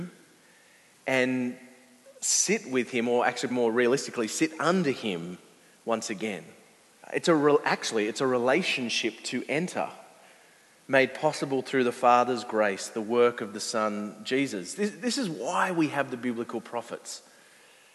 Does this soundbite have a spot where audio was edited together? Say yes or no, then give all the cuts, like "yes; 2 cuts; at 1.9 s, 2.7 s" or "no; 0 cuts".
yes; 2 cuts; at 3.5 s, 7.0 s